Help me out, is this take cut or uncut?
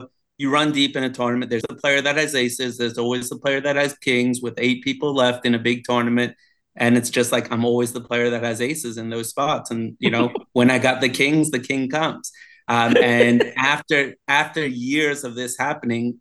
cut